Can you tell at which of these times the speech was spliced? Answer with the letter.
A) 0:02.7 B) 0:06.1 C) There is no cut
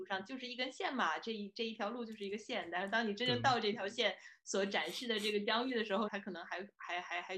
B